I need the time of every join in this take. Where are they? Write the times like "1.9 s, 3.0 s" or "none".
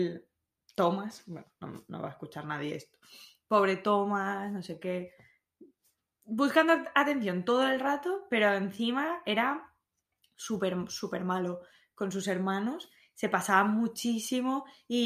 none